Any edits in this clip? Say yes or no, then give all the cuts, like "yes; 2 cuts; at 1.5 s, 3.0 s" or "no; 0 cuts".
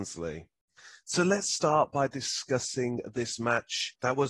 no; 0 cuts